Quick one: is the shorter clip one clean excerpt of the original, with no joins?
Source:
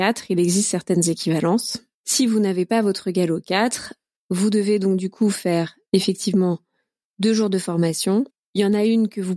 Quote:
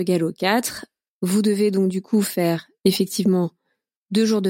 yes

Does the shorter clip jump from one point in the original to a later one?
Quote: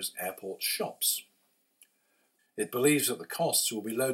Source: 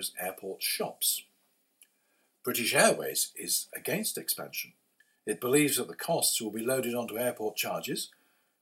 yes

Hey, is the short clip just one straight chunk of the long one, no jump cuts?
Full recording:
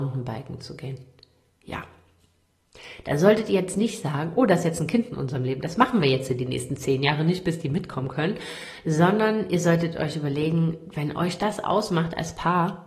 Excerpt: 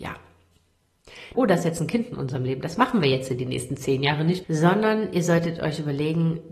no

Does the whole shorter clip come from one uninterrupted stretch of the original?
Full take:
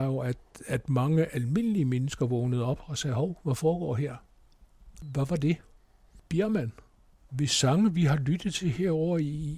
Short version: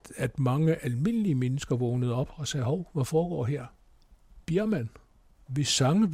no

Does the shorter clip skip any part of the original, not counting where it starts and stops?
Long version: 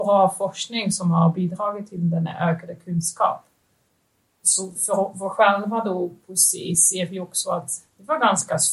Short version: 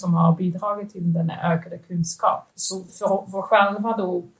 yes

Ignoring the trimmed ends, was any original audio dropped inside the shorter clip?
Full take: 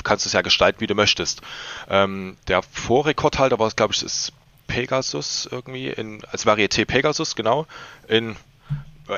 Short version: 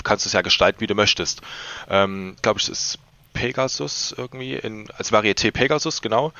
yes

